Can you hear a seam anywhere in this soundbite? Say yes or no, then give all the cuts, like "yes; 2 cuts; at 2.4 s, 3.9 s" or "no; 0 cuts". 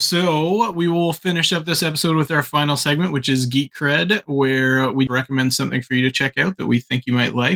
yes; 1 cut; at 5.1 s